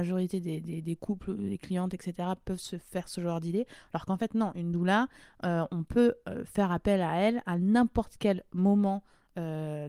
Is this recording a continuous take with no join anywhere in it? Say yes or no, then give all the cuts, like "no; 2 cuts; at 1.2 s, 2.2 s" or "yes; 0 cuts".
yes; 0 cuts